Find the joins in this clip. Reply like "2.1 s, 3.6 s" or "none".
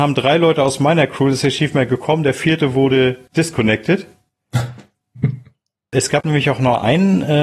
5.1 s